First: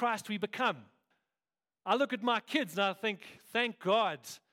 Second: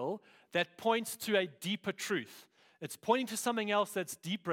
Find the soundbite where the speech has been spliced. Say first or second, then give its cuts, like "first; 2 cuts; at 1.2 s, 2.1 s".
first; 1 cut; at 1.1 s